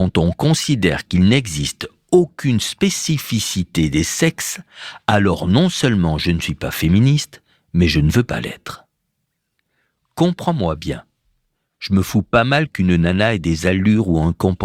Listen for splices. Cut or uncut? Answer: uncut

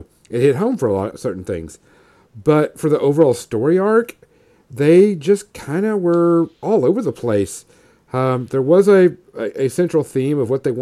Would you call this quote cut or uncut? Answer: cut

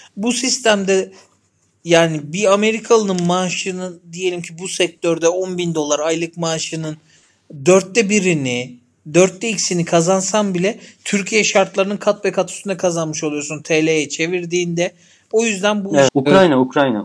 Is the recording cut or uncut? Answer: cut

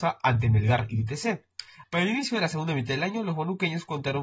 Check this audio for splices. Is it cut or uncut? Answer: cut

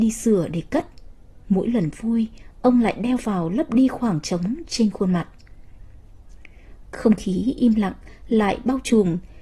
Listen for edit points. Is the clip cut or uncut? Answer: cut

